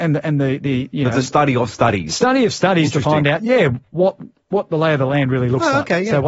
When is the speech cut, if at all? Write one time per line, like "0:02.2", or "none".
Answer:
none

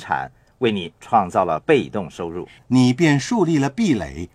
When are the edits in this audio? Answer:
0:02.6

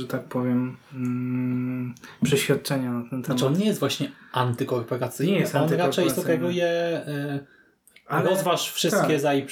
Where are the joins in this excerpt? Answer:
none

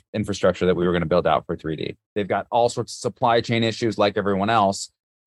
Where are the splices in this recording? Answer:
0:02.0

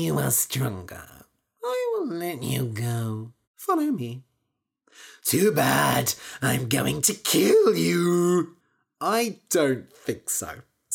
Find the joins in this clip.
0:03.4
0:05.2

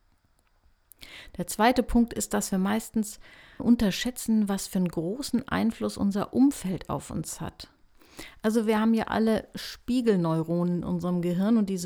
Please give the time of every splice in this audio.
0:03.6

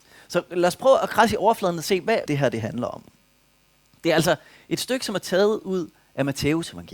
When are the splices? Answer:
0:02.3

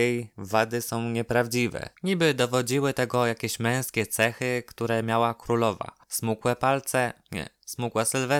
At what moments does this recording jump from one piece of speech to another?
0:02.0
0:06.0

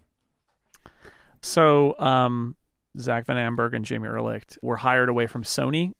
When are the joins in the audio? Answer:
0:02.9
0:04.6

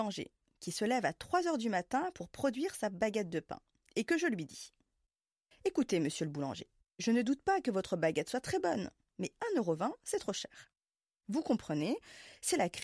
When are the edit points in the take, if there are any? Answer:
none

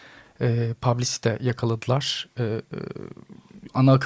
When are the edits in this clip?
none

